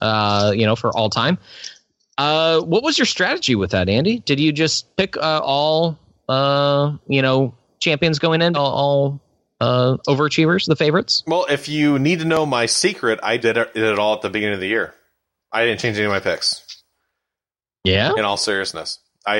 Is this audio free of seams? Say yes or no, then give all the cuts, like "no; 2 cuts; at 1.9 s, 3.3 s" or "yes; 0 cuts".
no; 2 cuts; at 8.5 s, 13.4 s